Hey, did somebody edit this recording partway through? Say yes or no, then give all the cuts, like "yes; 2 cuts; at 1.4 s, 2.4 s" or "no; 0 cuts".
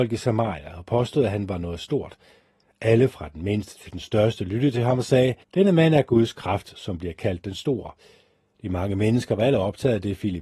yes; 2 cuts; at 5.4 s, 8.6 s